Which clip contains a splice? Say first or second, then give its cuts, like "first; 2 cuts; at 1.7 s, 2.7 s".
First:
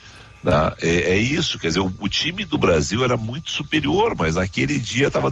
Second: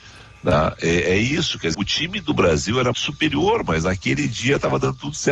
second; 2 cuts; at 1.7 s, 2.9 s